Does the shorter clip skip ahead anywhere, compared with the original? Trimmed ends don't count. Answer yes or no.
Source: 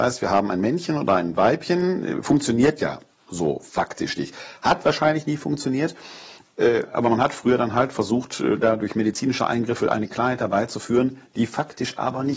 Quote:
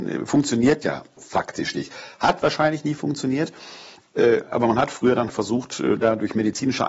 yes